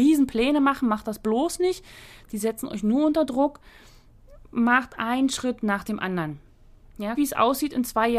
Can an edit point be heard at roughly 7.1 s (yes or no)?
yes